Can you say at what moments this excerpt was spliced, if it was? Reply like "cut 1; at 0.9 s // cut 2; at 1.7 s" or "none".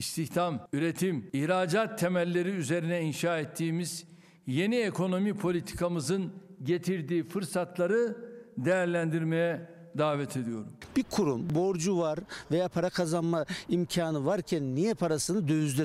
none